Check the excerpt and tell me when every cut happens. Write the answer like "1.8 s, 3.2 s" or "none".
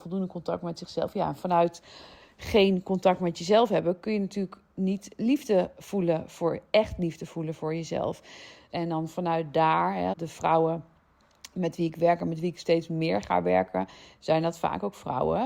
8.7 s, 10.1 s